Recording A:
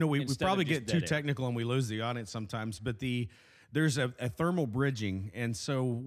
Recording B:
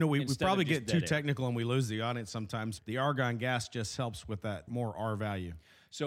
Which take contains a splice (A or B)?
B